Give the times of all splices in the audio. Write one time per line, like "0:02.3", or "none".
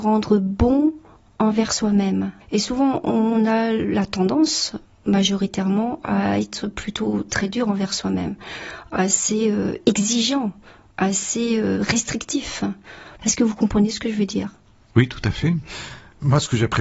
0:02.4
0:13.2